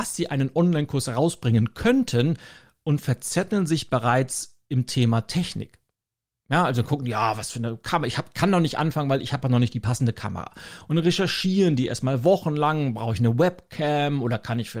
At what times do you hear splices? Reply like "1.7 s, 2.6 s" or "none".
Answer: none